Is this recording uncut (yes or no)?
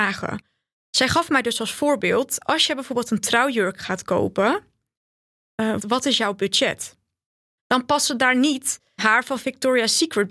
no